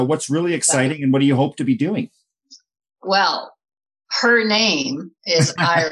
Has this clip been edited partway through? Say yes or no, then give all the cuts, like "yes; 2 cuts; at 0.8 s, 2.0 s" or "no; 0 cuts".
no; 0 cuts